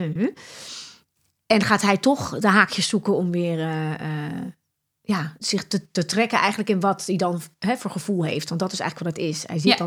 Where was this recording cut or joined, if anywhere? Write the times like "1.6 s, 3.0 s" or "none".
5.4 s